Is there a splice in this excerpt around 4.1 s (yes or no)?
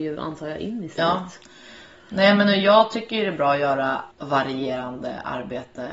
yes